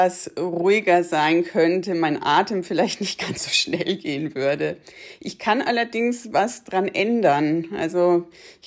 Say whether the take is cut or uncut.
uncut